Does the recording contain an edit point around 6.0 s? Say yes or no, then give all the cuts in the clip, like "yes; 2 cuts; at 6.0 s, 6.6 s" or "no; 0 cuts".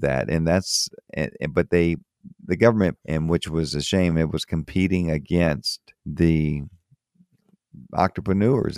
yes; 2 cuts; at 3.0 s, 6.0 s